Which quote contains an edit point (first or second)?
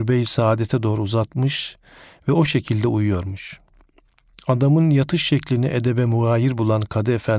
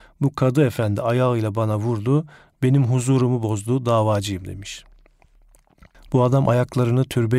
second